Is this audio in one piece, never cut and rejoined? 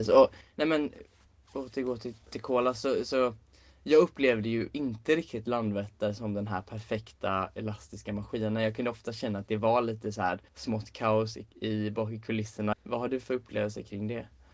no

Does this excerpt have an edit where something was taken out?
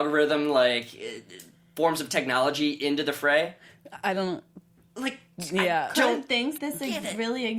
yes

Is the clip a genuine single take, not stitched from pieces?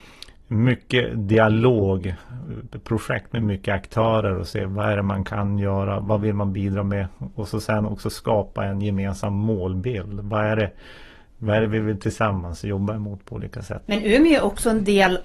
no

